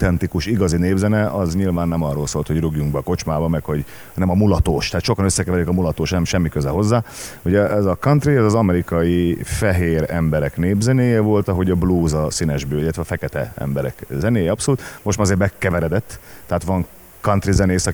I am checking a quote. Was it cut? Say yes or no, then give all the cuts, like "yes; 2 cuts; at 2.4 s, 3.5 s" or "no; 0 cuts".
no; 0 cuts